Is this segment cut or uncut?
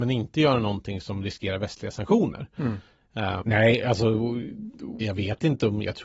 cut